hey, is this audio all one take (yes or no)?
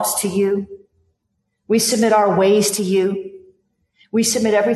yes